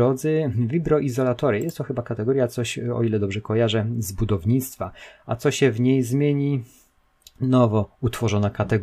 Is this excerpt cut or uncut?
uncut